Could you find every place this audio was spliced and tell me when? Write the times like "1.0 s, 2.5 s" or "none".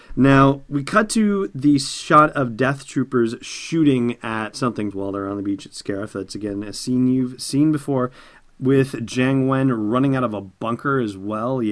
4.9 s